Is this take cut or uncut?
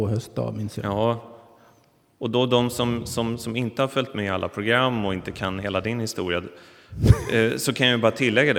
uncut